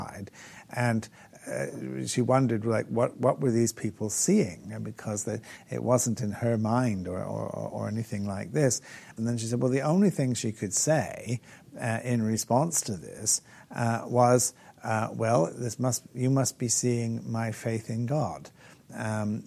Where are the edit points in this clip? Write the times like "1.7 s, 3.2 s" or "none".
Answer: 9.2 s, 15.5 s